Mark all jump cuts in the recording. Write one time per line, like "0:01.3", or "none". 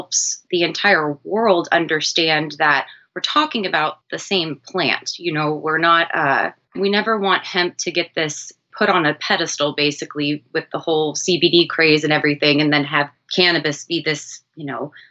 none